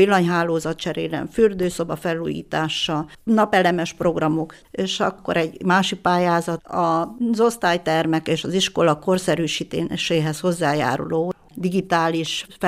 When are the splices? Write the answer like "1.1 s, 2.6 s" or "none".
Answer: 4.6 s, 6.6 s